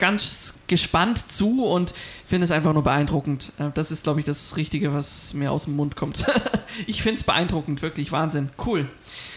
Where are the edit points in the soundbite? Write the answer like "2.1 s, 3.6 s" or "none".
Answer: none